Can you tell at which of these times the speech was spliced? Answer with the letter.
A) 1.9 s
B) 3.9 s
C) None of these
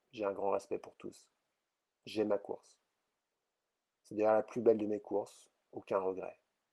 C